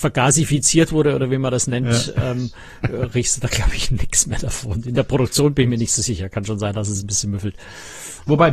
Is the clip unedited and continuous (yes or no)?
yes